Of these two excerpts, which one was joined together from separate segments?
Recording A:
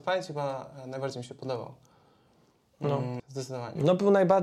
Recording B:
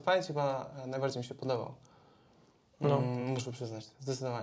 A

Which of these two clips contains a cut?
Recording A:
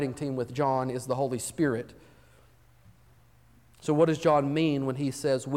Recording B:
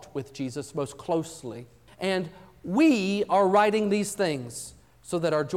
B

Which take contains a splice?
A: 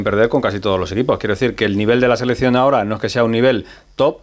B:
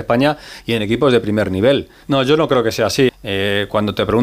B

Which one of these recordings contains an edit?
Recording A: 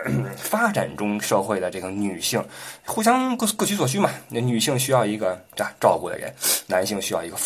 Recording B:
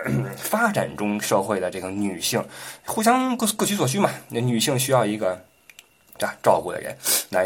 A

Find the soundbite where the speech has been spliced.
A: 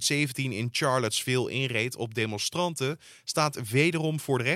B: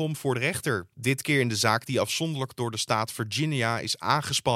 B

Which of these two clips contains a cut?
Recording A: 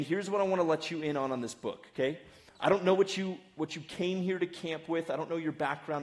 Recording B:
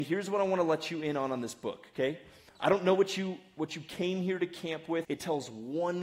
B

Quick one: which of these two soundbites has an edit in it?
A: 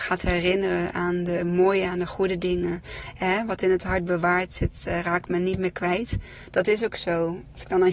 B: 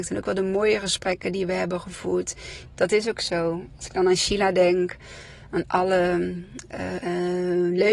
B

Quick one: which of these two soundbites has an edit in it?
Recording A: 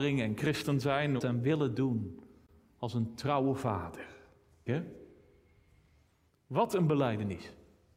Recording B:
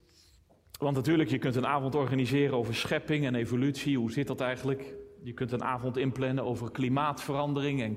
A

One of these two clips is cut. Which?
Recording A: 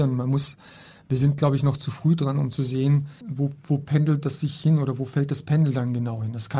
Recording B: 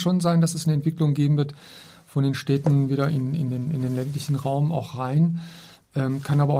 A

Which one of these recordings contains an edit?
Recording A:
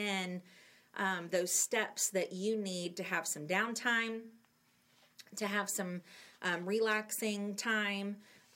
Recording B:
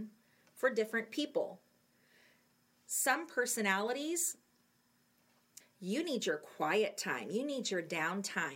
B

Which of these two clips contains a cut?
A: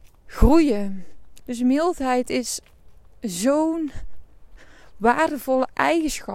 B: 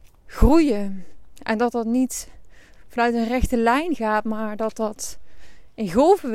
A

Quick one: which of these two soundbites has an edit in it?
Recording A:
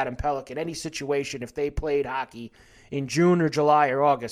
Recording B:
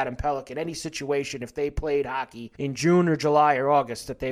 B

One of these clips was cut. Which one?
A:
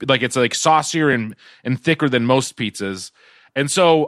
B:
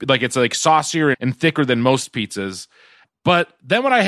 B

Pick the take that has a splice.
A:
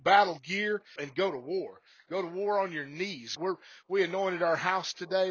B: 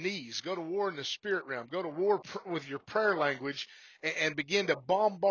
A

